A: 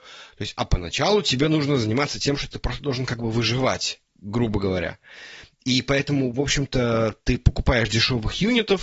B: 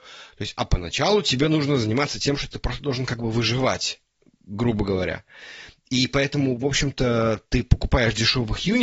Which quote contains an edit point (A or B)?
A